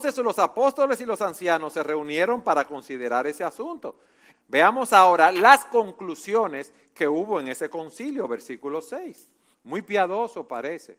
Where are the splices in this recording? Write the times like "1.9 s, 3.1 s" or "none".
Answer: 4.3 s, 9.5 s